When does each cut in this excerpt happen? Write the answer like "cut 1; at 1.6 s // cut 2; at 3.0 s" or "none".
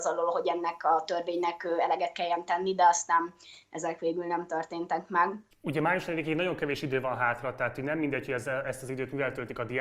cut 1; at 5.5 s